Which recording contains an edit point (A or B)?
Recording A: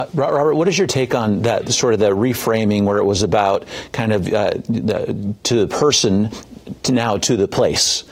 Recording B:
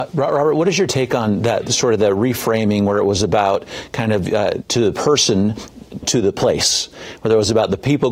B